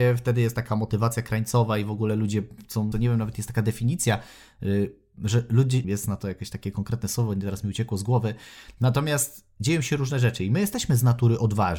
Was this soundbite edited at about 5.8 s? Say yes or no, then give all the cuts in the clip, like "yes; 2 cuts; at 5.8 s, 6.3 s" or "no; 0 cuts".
yes; 2 cuts; at 2.9 s, 5.8 s